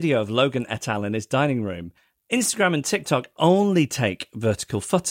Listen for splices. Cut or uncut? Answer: uncut